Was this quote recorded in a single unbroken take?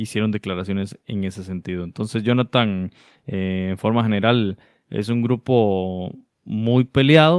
yes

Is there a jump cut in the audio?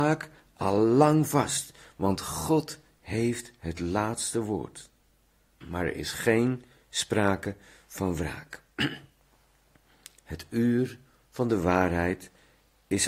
yes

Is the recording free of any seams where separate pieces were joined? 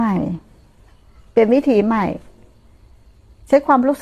yes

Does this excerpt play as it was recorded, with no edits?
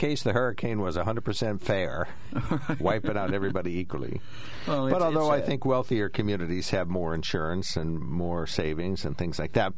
yes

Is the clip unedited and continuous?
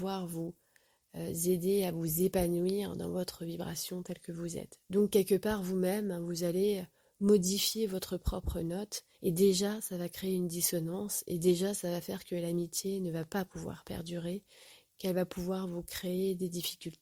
no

